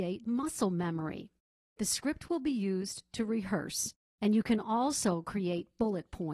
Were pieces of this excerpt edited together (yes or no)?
no